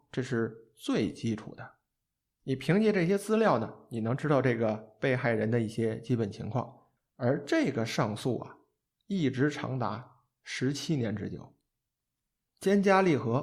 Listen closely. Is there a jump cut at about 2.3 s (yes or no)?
no